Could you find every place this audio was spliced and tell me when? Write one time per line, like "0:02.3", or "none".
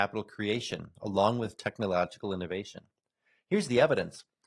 none